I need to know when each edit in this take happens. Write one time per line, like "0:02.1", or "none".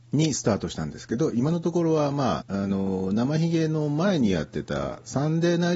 0:02.4

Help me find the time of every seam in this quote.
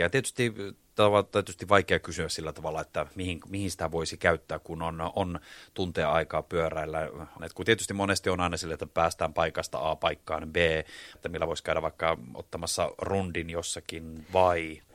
0:07.4
0:11.2

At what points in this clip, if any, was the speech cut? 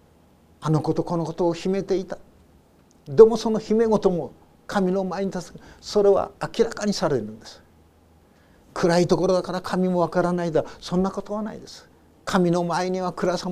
none

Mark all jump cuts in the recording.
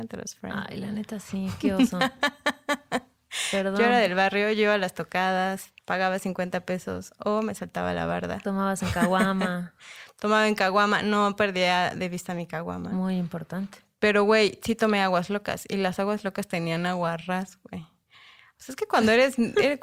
0:05.8

